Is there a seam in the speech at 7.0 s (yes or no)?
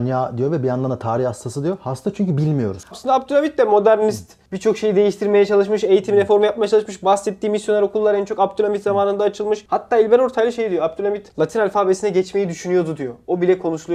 no